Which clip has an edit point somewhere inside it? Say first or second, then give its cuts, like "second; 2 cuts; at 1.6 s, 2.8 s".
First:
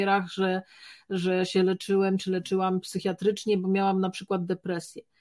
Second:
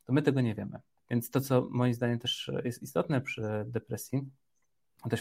second; 1 cut; at 1.0 s